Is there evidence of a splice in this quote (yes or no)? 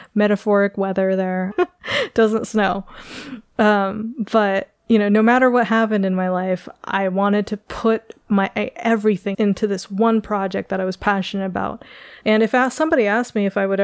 yes